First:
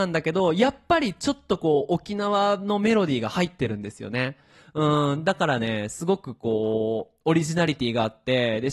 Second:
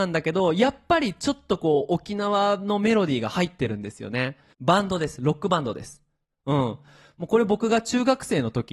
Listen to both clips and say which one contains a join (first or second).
second